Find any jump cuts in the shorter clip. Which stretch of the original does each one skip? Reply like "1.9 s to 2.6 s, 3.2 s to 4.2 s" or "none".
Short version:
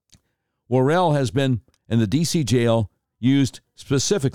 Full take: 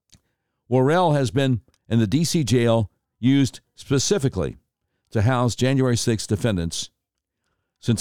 none